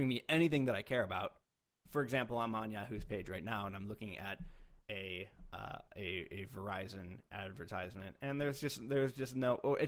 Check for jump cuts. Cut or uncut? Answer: uncut